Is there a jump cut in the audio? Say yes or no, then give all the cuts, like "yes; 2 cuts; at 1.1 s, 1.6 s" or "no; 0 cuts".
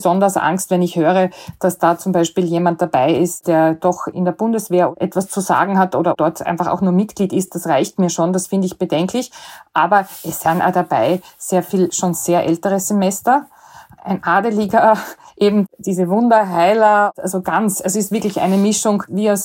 no; 0 cuts